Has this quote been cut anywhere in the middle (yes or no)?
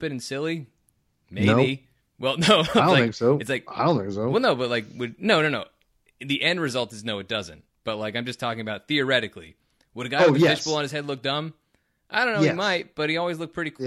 no